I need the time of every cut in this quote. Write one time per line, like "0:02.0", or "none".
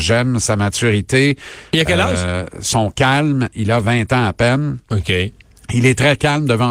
none